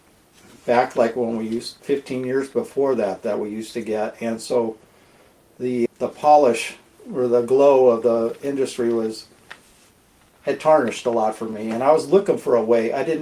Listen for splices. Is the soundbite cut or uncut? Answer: cut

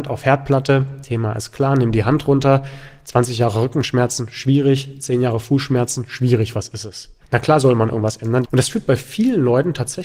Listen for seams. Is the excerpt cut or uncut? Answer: cut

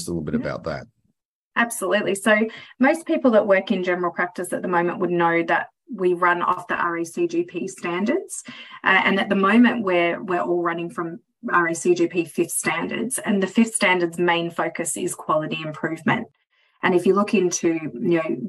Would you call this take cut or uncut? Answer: uncut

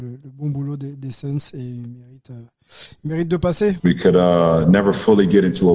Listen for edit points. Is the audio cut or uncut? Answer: cut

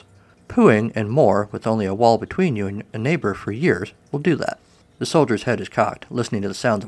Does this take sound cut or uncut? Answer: uncut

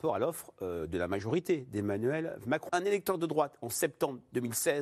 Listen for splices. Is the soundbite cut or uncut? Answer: cut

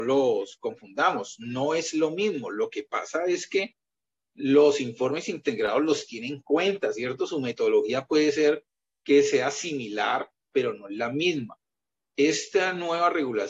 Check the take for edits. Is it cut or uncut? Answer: uncut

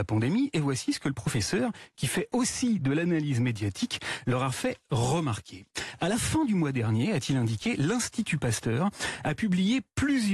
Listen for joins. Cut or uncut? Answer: uncut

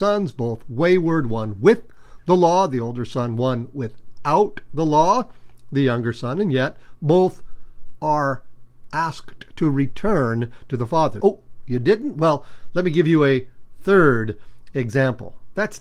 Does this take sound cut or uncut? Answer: cut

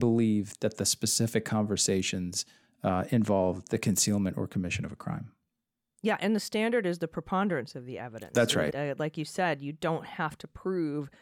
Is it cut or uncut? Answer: cut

